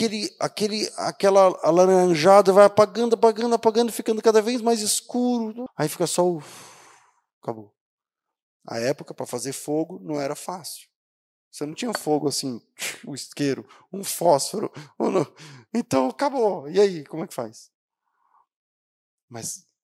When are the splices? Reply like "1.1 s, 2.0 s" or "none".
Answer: 5.7 s